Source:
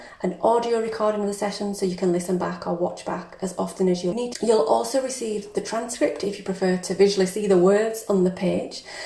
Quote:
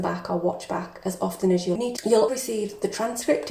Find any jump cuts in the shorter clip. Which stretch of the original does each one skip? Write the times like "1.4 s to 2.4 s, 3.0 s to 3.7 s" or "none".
4.7 s to 5.0 s